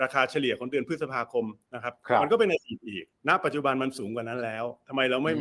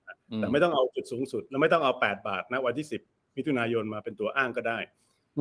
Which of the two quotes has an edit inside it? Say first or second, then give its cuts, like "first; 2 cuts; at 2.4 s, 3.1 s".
first; 2 cuts; at 1.6 s, 3.2 s